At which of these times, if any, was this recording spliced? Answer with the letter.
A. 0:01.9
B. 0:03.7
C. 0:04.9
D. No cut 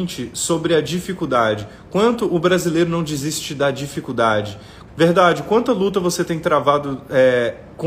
C